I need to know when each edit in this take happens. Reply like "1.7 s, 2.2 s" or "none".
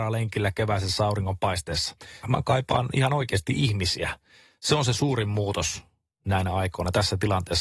2.2 s